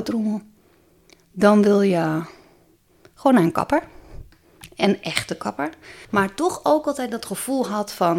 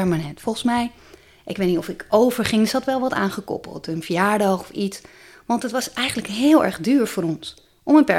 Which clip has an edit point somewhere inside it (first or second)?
first